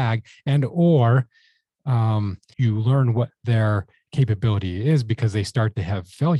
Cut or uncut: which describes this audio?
cut